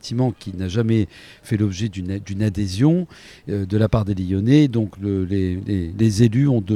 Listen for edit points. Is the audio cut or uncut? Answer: uncut